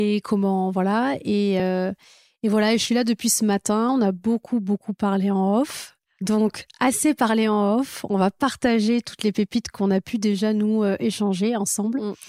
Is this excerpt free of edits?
yes; 0 cuts

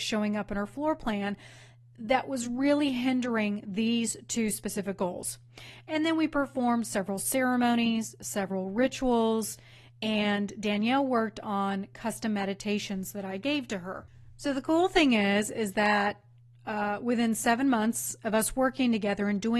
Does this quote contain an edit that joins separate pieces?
no; 0 cuts

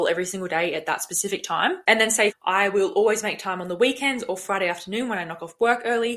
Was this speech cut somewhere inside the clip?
yes; 1 cut; at 2.3 s

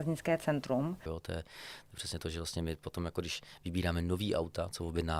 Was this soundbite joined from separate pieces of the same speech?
yes; 1 cut; at 1.1 s

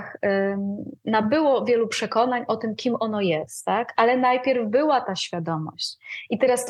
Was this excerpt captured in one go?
yes; 0 cuts

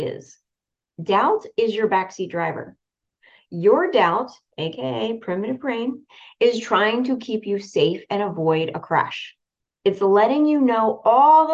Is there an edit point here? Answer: no; 0 cuts

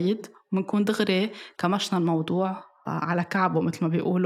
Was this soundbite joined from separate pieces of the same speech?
yes; 1 cut; at 2.8 s

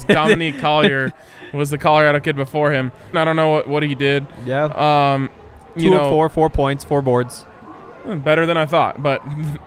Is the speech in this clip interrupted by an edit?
yes; 1 cut; at 3.1 s

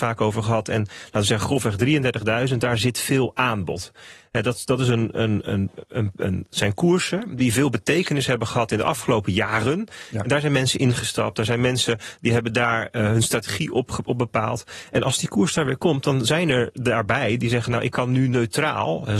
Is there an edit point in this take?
no; 0 cuts

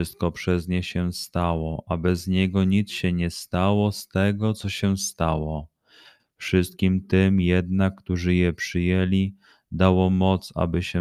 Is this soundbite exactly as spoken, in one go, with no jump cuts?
no; 1 cut; at 6.2 s

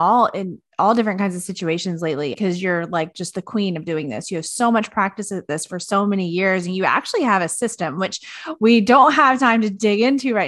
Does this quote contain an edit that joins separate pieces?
yes; 1 cut; at 2.3 s

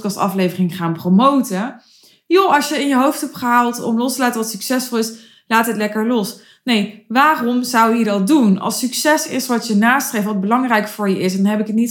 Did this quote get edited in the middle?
no; 0 cuts

